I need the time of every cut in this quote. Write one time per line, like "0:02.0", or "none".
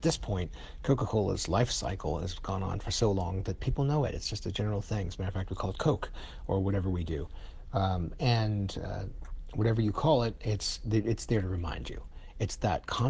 none